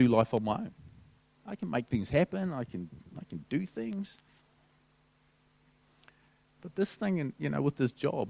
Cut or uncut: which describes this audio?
uncut